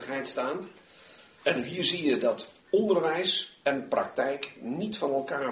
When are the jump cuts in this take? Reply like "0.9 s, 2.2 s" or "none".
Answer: 1.4 s, 2.6 s